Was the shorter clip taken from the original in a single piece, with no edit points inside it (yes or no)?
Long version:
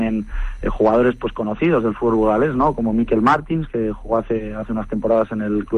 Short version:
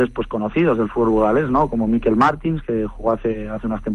yes